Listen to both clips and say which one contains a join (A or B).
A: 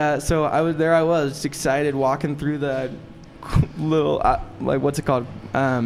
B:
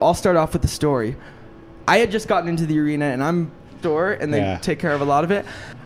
B